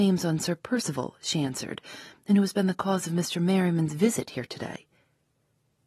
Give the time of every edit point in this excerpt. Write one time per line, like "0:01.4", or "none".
none